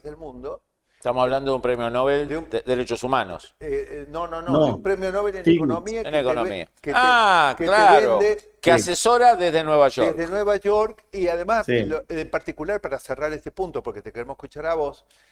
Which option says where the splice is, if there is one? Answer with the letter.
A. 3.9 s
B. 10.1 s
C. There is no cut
C